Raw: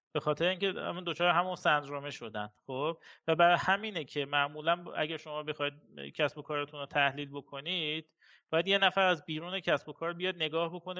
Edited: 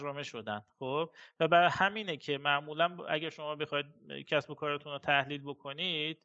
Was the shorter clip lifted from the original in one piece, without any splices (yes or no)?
yes